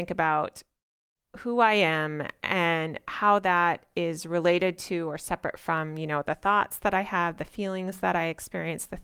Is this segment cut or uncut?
uncut